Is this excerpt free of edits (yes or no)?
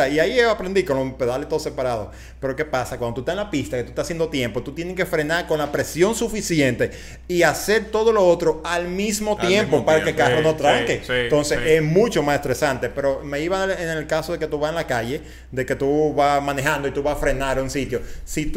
yes